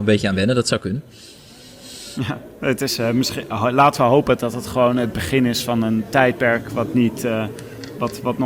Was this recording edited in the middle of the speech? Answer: no; 0 cuts

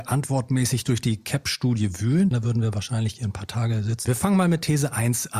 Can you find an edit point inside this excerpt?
yes; 2 cuts; at 2.3 s, 4.0 s

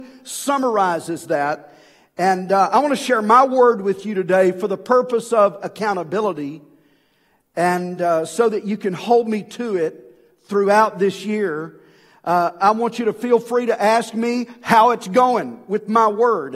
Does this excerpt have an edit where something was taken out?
no; 0 cuts

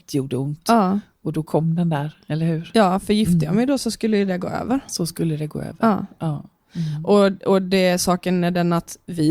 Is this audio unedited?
yes; 0 cuts

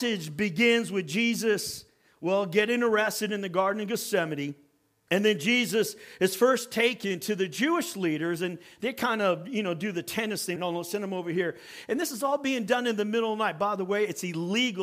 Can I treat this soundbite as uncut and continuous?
no; 1 cut; at 10.6 s

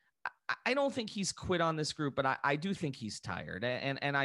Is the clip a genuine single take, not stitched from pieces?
yes; 0 cuts

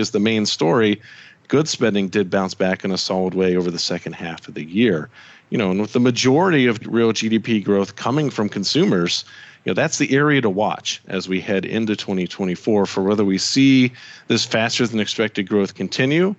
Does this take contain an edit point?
no; 0 cuts

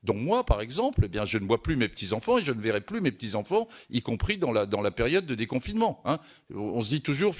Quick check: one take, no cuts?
yes; 0 cuts

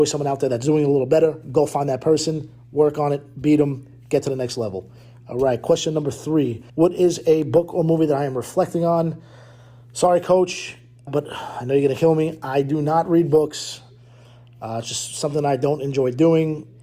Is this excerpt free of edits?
no; 2 cuts; at 6.7 s, 11.1 s

